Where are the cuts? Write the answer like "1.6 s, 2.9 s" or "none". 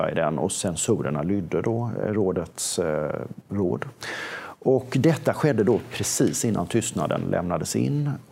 3.5 s, 4.6 s

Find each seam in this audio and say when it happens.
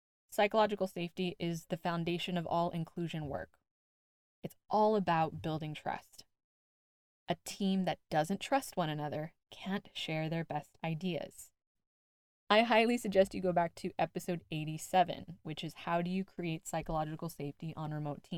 11.8 s

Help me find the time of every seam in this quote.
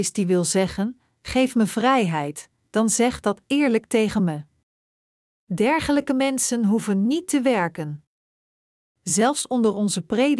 2.6 s

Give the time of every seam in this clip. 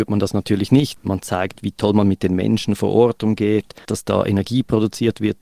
1.0 s, 3.8 s

